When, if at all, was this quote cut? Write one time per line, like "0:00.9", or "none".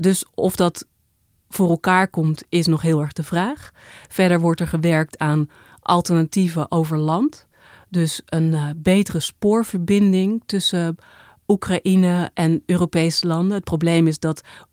none